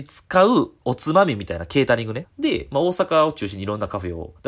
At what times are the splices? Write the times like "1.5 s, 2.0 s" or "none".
2.2 s